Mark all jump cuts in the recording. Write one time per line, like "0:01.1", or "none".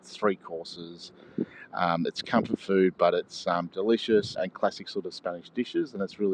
0:04.3